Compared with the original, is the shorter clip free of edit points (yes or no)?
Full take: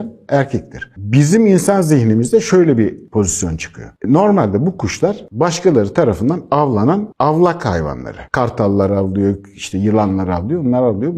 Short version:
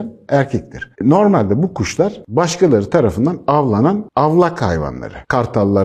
no